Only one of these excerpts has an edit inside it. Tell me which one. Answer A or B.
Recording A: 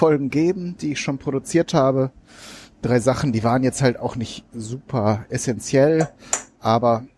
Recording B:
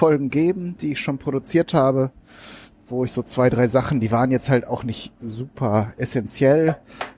A